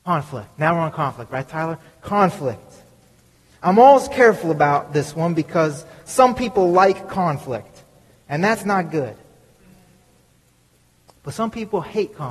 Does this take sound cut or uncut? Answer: uncut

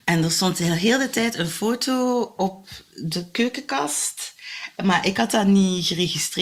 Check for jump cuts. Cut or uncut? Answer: uncut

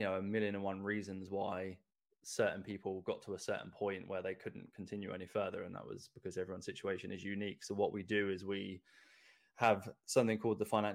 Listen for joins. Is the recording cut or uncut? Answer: uncut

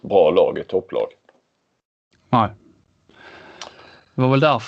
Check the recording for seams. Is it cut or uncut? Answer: uncut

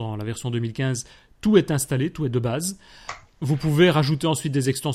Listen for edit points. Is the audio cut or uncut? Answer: uncut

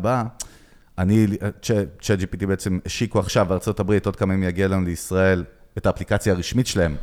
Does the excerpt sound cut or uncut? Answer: uncut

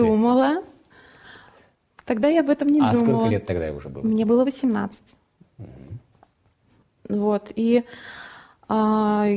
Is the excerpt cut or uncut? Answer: uncut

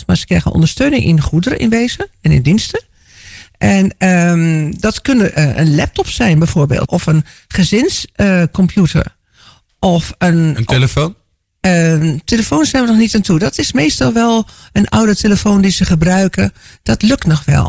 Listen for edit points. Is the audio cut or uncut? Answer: cut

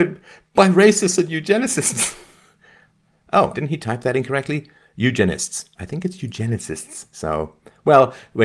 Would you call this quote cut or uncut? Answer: cut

